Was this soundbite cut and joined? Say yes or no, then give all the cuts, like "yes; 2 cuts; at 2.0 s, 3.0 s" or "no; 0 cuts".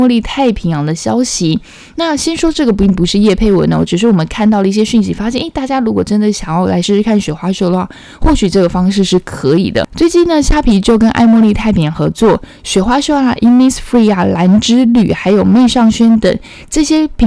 no; 0 cuts